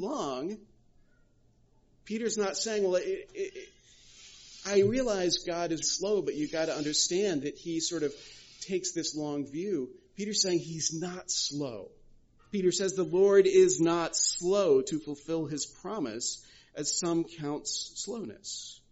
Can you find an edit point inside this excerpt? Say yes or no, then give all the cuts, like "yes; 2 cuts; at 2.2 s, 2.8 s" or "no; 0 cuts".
yes; 3 cuts; at 5.8 s, 7.4 s, 12.4 s